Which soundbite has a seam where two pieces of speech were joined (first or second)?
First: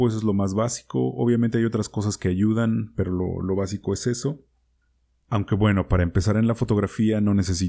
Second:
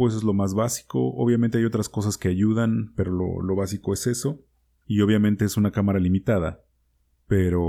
second